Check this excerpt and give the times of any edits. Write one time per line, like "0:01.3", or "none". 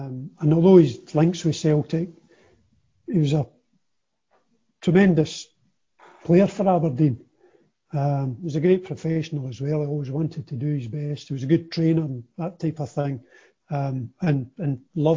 none